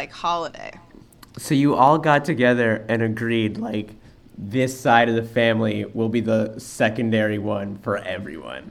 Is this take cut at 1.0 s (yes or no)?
no